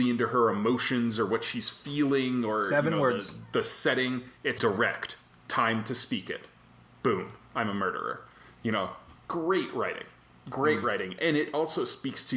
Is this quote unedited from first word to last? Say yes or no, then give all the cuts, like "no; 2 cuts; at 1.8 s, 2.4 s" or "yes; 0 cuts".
no; 1 cut; at 4.6 s